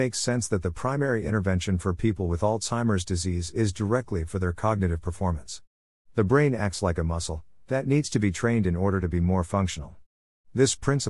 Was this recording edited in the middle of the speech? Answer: no; 0 cuts

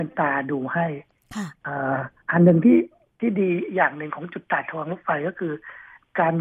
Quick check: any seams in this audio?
yes; 1 cut; at 2.2 s

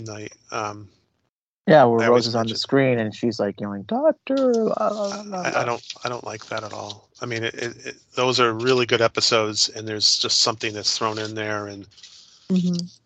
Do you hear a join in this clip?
no; 0 cuts

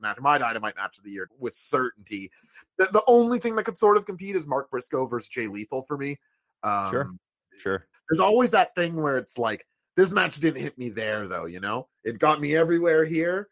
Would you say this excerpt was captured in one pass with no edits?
no; 2 cuts; at 1.3 s, 7.9 s

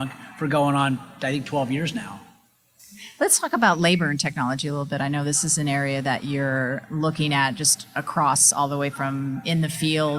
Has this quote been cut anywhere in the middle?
no; 0 cuts

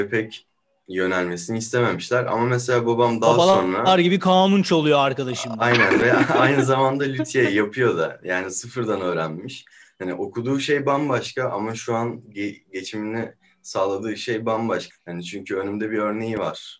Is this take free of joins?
no; 1 cut; at 14.9 s

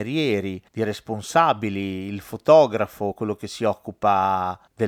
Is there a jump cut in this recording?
no; 0 cuts

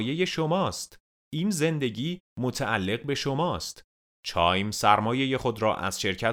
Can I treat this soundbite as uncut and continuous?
no; 1 cut; at 4.0 s

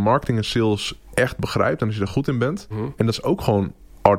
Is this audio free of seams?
no; 1 cut; at 2.7 s

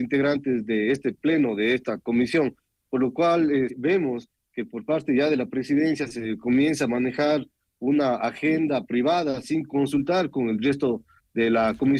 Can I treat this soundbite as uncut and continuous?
no; 1 cut; at 3.7 s

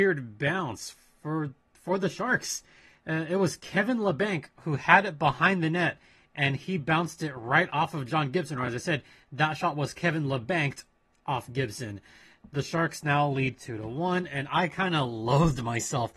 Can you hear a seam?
no; 0 cuts

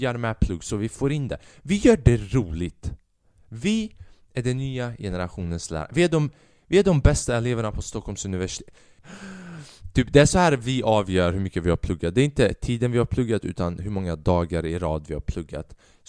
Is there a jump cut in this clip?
yes; 1 cut; at 9.0 s

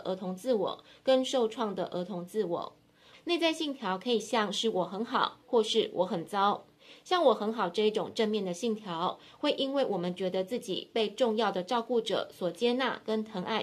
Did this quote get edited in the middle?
yes; 1 cut; at 3.1 s

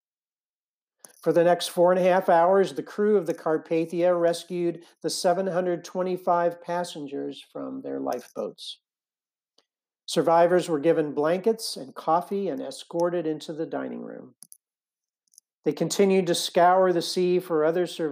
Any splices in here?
no; 0 cuts

